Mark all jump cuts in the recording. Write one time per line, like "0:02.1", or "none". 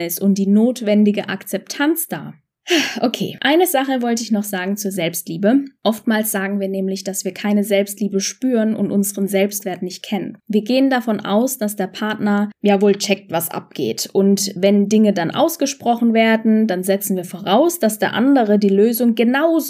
0:10.4